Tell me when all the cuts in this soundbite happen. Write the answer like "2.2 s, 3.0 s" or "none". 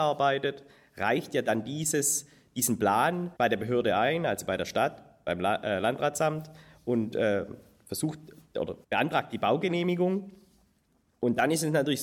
3.4 s, 8.8 s

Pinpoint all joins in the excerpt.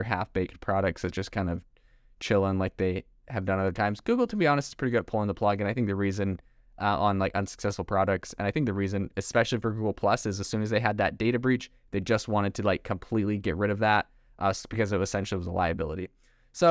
none

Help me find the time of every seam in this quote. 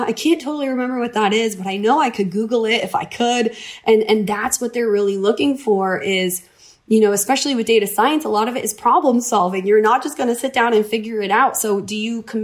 none

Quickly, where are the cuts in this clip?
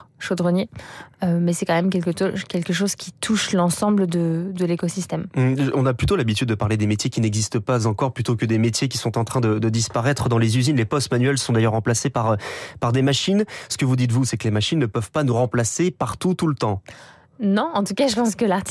none

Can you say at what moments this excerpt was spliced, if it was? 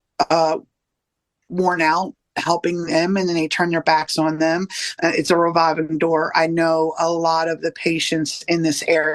5.0 s

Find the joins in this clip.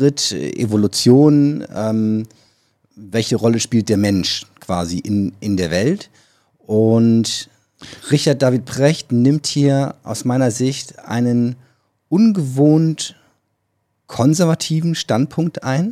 none

